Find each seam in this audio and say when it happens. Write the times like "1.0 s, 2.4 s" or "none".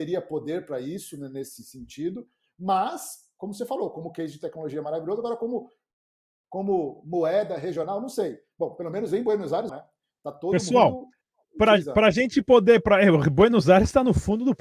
9.7 s